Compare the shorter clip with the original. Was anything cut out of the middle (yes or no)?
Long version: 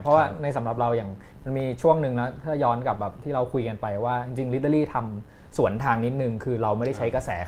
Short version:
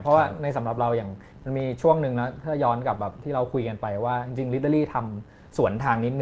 no